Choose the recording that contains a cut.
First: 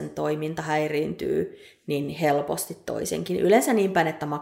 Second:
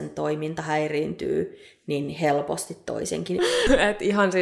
second; 1 cut; at 3.4 s

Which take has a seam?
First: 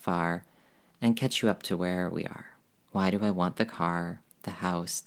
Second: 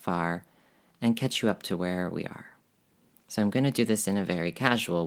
first; 1 cut; at 2.8 s

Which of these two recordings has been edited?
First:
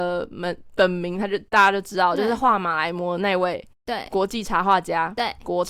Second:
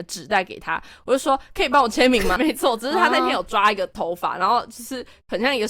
second; 1 cut; at 2.4 s

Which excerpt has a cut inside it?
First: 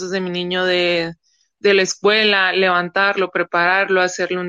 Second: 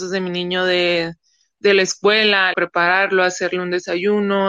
second; 1 cut; at 2.5 s

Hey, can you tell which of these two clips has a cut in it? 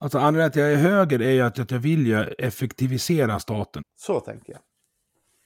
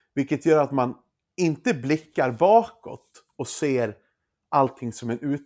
first; 2 cuts; at 1.5 s, 3.8 s

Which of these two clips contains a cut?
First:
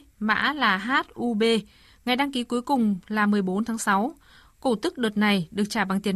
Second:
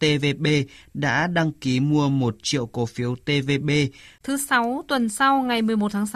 second; 1 cut; at 4.2 s

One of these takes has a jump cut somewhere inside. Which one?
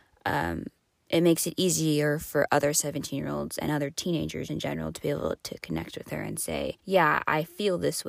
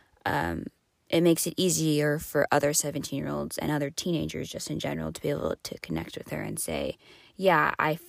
first; 2 cuts; at 4.5 s, 6.8 s

